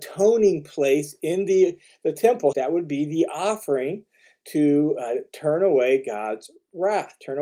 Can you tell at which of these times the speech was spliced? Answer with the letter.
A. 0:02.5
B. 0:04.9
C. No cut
A